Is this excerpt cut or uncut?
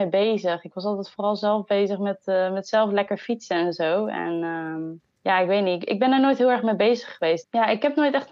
cut